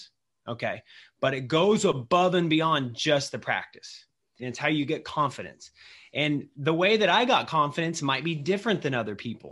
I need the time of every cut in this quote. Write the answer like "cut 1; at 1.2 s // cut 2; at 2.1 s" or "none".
cut 1; at 4.4 s